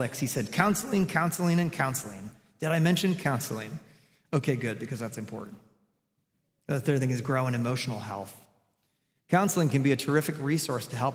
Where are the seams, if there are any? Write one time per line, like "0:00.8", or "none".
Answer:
none